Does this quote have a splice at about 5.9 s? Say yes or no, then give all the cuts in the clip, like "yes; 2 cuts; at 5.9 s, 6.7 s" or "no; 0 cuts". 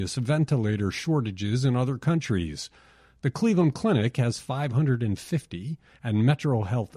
yes; 1 cut; at 5.9 s